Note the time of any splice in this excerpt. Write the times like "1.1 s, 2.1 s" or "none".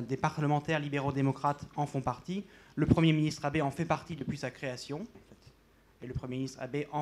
5.1 s

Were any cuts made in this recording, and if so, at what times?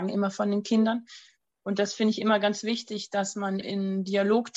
3.6 s

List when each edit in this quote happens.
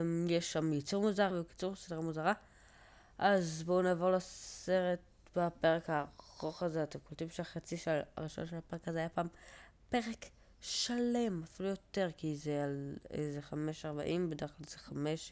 1.3 s

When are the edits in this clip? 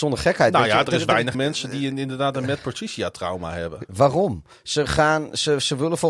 1.3 s, 3.9 s

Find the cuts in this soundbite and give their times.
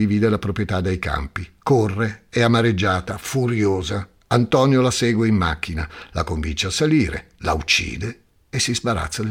none

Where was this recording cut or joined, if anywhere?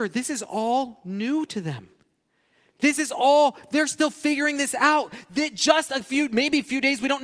none

